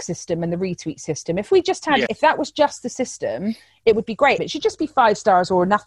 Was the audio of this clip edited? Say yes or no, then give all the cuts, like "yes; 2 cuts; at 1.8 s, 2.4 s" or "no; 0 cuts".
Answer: yes; 2 cuts; at 2.1 s, 4.4 s